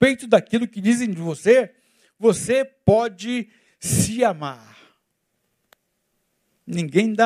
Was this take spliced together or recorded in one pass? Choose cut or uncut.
uncut